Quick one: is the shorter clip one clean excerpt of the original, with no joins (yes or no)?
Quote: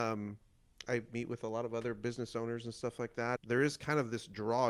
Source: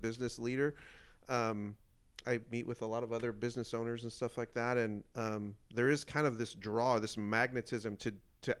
no